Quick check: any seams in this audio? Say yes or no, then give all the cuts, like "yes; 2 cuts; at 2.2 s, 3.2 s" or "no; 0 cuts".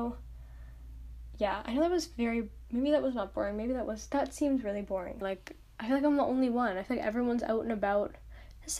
yes; 1 cut; at 5.2 s